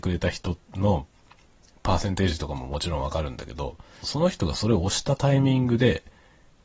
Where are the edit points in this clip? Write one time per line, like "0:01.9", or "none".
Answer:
0:04.0